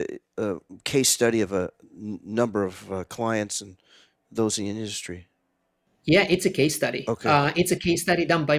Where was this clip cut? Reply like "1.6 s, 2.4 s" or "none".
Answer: none